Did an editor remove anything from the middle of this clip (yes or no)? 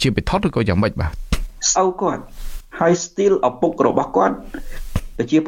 yes